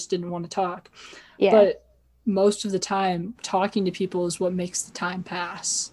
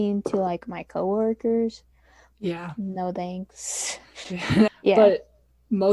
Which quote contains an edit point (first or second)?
second